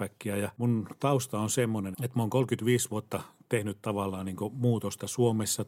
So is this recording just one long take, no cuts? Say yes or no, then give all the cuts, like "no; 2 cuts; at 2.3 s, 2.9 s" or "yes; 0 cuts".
no; 1 cut; at 1.9 s